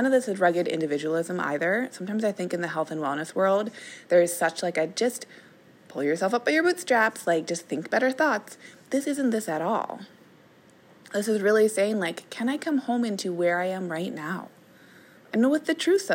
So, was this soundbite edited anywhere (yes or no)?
no